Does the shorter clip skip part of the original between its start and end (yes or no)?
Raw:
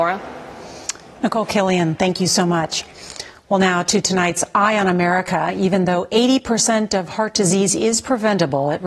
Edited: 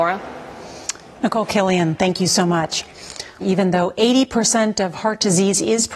yes